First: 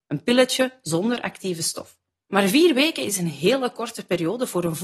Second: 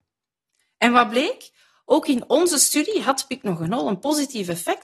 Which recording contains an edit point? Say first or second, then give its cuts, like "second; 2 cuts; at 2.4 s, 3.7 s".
first; 1 cut; at 2.3 s